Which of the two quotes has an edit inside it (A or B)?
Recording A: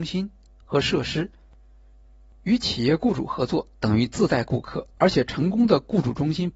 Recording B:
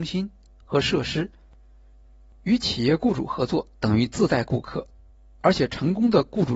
A